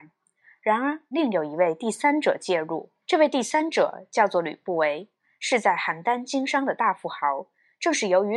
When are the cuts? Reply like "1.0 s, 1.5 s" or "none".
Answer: 1.1 s, 3.0 s